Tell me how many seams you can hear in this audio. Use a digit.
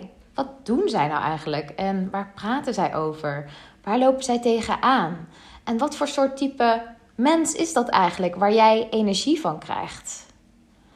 0